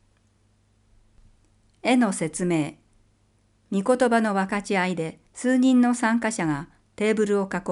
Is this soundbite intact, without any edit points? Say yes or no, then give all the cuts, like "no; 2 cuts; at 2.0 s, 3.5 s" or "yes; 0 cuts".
no; 2 cuts; at 1.8 s, 5.3 s